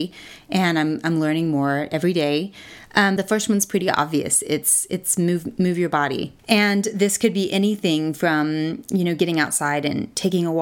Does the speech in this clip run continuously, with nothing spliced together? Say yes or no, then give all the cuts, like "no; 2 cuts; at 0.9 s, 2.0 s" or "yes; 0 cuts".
no; 2 cuts; at 3.2 s, 6.4 s